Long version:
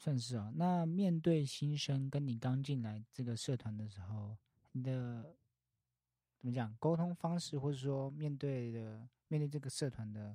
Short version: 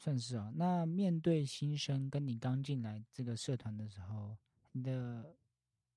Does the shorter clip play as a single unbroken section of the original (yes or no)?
yes